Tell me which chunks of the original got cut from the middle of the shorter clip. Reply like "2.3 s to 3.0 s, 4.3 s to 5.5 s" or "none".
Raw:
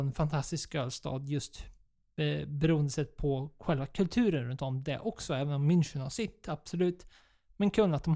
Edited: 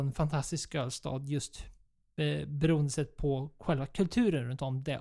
none